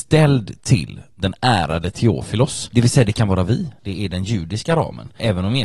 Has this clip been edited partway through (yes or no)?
yes